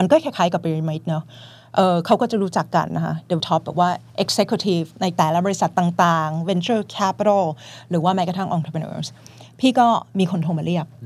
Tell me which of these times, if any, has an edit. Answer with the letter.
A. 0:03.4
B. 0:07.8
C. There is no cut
A